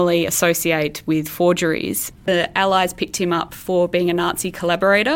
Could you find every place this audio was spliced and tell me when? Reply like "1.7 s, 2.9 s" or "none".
2.1 s